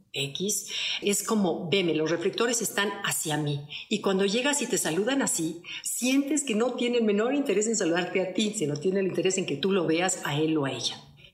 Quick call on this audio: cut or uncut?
uncut